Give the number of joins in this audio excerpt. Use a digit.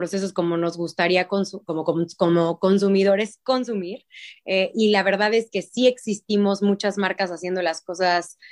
0